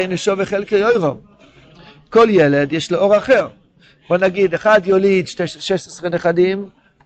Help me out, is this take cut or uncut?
uncut